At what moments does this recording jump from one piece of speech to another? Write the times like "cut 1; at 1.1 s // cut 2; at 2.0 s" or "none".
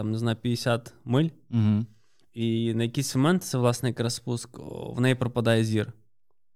none